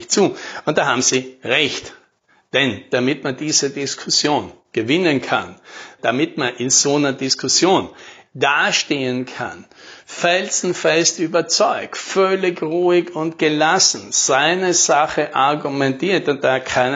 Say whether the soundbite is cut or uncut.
uncut